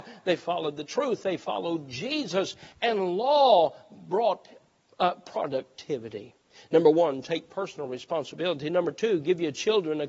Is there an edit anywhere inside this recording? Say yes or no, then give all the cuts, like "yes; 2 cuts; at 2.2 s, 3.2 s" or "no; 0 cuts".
yes; 1 cut; at 2.7 s